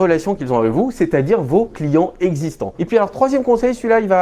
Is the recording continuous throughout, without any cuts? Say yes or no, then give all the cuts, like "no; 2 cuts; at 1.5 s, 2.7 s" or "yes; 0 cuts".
no; 1 cut; at 2.8 s